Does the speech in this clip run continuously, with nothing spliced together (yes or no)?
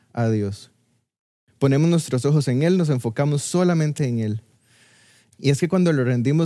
no